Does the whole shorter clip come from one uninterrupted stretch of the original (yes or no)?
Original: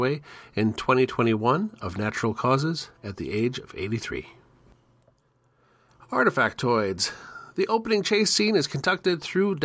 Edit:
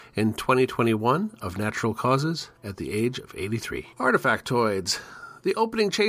no